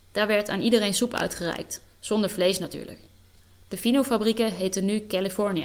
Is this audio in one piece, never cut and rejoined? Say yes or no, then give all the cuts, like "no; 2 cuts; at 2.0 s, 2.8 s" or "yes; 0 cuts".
yes; 0 cuts